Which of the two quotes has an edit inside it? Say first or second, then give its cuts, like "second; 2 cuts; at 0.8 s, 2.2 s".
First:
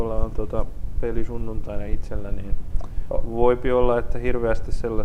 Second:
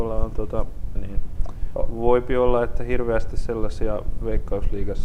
second; 1 cut; at 1.0 s